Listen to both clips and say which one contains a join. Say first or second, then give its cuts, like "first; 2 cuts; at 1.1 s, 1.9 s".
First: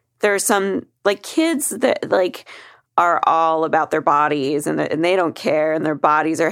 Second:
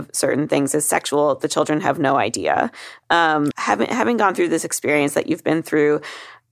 second; 1 cut; at 3.5 s